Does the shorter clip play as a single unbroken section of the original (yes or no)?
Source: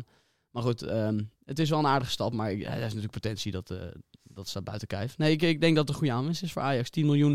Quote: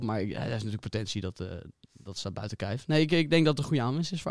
yes